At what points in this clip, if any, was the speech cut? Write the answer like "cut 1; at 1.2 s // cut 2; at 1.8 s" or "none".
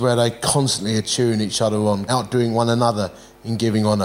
cut 1; at 2.1 s